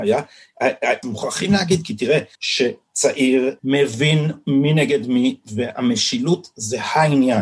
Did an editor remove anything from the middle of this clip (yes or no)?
yes